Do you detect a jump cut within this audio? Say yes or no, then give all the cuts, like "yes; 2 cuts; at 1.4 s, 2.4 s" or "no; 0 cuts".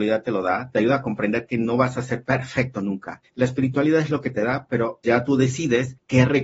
yes; 2 cuts; at 3.3 s, 5.0 s